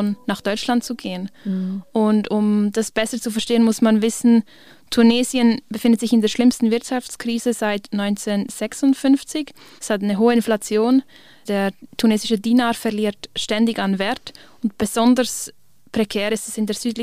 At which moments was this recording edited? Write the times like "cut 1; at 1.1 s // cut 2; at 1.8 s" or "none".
none